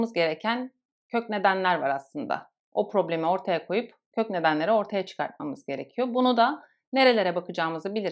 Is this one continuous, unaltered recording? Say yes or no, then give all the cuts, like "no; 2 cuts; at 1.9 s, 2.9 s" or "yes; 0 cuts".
yes; 0 cuts